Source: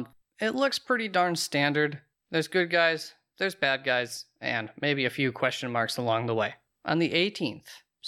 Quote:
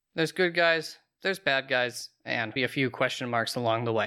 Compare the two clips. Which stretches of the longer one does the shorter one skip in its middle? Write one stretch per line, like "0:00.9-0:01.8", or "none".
0:04.7-0:05.0